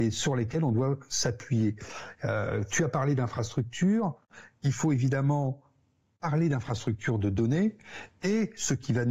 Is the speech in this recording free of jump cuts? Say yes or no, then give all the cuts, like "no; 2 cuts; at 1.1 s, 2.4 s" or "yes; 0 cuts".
yes; 0 cuts